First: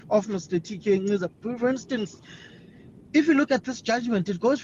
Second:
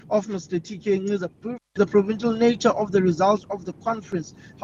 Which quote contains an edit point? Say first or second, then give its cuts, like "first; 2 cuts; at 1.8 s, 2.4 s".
second; 1 cut; at 1.6 s